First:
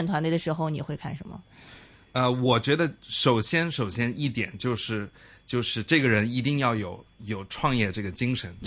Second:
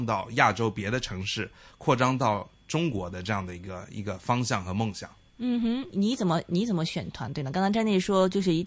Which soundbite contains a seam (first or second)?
second